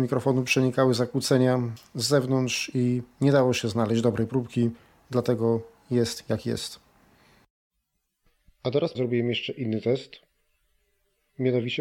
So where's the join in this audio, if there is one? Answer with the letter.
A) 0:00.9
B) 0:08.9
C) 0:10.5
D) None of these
B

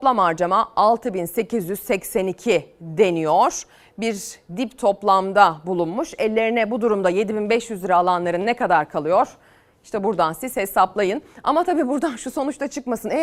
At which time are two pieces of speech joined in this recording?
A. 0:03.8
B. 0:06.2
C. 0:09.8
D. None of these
D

